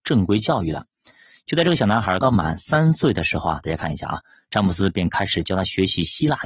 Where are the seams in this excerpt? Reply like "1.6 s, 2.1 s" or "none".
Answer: 2.2 s